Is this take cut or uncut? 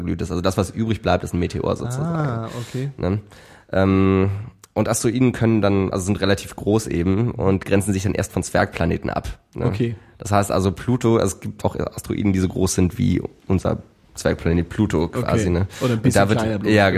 cut